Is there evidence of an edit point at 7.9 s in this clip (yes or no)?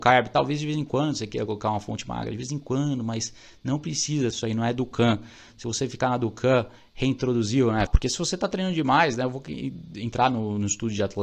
yes